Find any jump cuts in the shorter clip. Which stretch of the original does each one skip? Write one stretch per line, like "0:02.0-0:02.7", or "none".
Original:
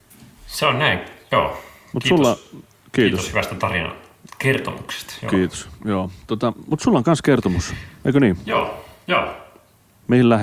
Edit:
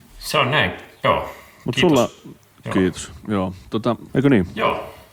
0:02.9-0:05.2
0:06.6-0:08.0